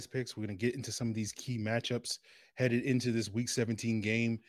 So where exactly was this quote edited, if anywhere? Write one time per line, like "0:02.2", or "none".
none